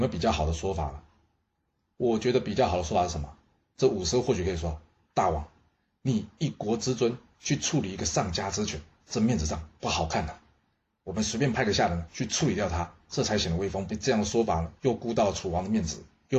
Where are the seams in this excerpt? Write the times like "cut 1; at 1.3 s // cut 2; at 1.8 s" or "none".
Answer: cut 1; at 13.9 s